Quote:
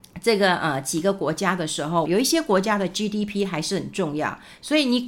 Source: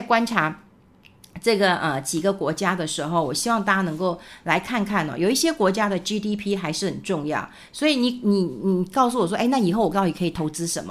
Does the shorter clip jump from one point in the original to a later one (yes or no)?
yes